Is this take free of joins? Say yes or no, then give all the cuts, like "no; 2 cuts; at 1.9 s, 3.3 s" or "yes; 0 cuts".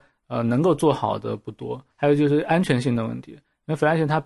no; 1 cut; at 1.9 s